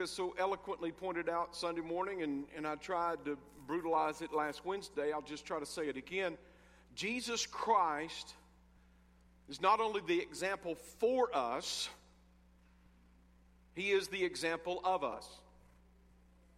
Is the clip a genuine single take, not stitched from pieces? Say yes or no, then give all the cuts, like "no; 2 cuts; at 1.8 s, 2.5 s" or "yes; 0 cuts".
yes; 0 cuts